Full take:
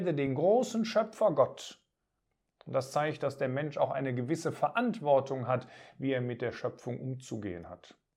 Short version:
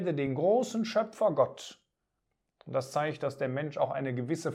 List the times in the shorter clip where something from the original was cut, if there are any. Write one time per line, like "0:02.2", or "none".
none